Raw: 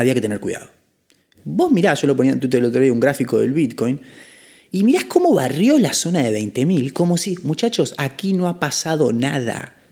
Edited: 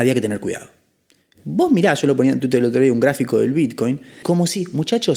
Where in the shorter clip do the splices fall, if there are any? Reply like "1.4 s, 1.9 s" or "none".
4.2 s